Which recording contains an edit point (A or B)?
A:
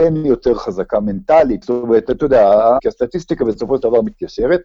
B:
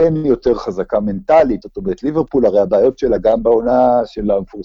A